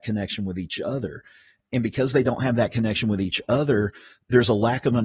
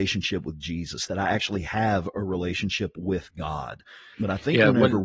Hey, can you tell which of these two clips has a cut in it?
second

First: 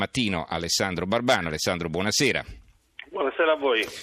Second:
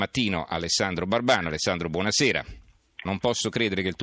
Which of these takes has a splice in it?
second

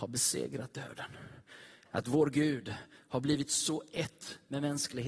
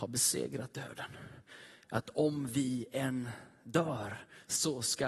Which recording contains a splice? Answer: first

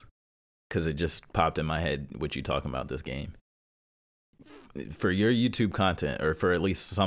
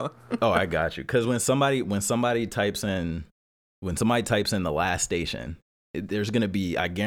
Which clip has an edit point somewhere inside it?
second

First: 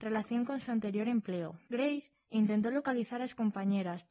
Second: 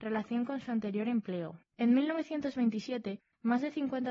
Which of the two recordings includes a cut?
second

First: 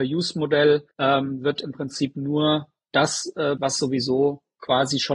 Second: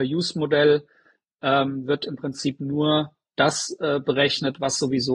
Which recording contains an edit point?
first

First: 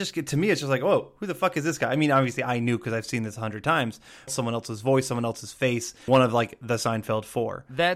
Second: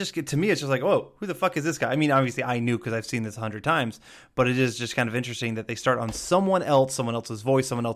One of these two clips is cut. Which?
first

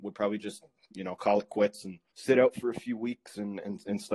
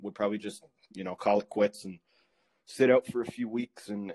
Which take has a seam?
first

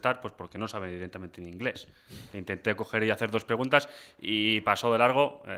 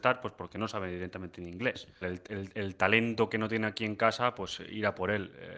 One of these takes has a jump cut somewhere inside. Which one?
second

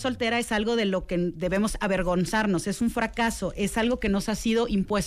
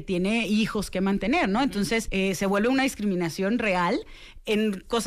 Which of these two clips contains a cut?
second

